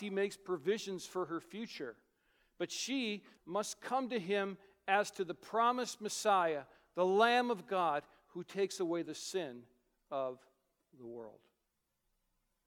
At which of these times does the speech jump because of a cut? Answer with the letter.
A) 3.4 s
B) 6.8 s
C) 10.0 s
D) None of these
A